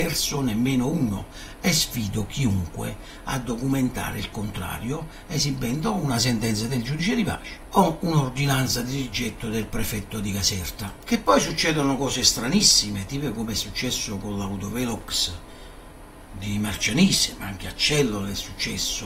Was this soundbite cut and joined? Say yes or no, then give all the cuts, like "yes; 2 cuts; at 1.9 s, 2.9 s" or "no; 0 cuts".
no; 0 cuts